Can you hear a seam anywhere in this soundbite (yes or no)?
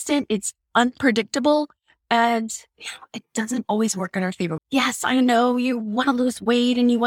yes